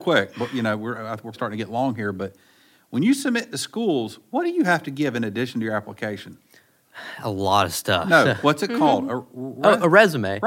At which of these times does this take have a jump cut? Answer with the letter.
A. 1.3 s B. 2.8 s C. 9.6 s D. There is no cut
A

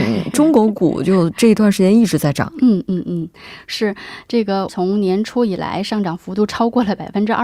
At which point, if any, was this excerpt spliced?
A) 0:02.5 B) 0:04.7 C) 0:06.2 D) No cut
B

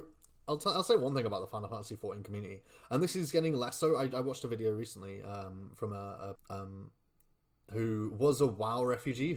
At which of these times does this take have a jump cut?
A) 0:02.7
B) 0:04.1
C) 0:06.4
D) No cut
C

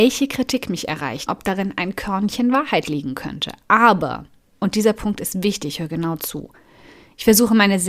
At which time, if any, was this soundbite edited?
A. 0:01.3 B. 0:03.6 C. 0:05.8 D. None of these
A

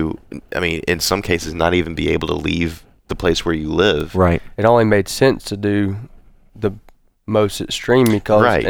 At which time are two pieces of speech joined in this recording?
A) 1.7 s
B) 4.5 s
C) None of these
B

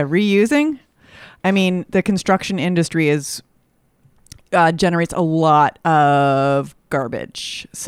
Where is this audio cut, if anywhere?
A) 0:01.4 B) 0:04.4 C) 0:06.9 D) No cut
A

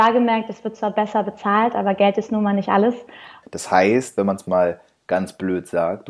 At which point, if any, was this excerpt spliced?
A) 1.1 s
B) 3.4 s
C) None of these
B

